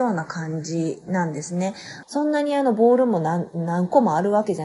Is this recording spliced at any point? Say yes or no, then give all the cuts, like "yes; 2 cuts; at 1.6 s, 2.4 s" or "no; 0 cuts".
yes; 1 cut; at 2.0 s